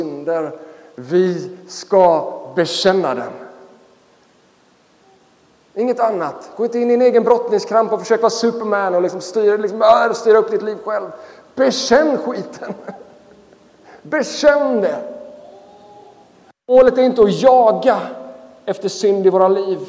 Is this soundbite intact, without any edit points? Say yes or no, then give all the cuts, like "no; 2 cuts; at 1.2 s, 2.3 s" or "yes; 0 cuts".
yes; 0 cuts